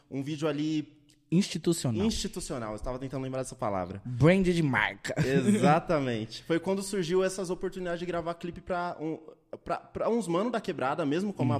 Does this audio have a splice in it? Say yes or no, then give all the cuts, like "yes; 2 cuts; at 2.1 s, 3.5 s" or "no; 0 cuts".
no; 0 cuts